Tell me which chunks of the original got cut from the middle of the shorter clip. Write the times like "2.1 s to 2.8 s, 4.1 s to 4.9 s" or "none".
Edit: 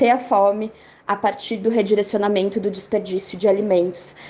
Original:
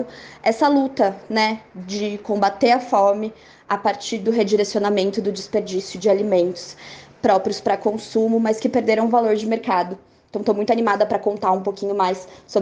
none